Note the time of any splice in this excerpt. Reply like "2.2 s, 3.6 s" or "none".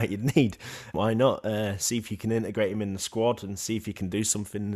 0.9 s

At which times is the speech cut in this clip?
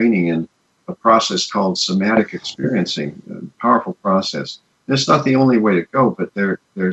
4.7 s

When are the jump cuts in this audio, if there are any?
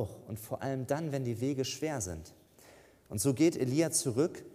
none

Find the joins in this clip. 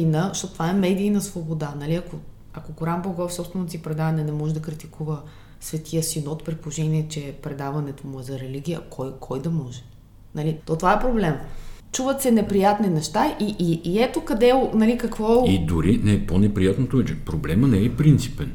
10.6 s

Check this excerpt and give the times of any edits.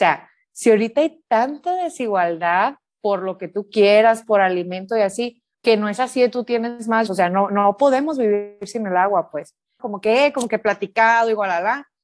5.5 s, 7.1 s, 9.8 s

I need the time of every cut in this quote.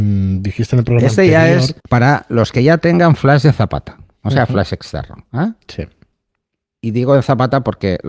1.8 s

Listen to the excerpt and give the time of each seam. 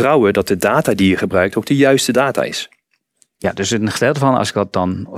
none

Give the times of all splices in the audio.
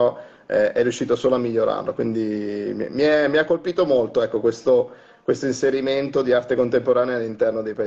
none

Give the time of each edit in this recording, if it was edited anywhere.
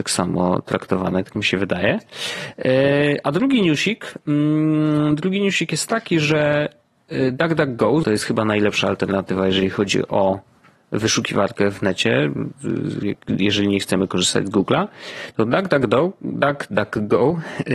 8.0 s

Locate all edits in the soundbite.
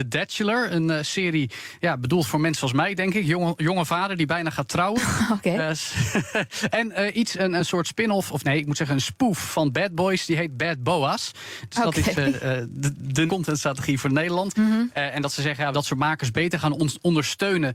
13.3 s, 14.5 s, 15.7 s

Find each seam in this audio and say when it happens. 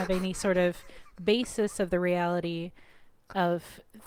none

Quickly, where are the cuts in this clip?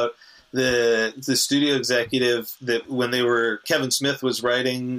3.6 s

